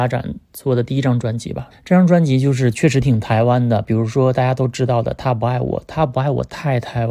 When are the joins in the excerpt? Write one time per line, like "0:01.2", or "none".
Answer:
0:01.7